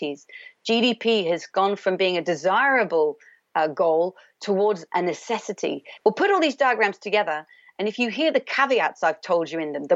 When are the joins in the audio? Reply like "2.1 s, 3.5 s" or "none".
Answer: 6.0 s